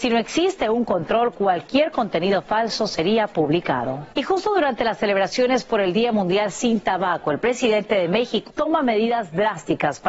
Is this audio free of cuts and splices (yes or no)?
no